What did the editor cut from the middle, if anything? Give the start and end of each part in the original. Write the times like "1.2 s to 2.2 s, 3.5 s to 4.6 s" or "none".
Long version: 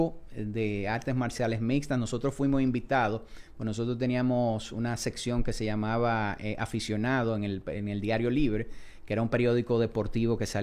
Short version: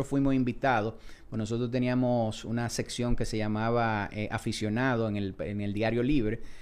none